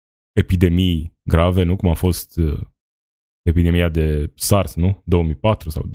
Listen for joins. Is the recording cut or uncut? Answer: uncut